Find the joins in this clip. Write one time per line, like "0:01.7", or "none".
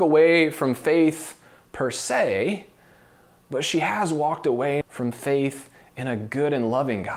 0:04.8